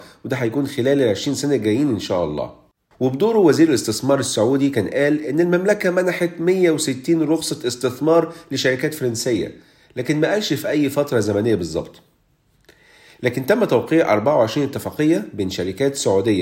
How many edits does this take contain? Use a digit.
1